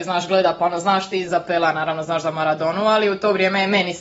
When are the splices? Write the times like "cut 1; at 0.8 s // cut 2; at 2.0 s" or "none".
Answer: cut 1; at 1.3 s